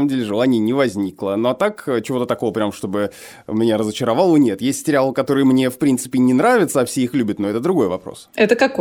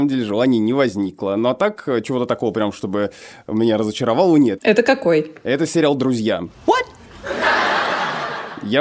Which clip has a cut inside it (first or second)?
second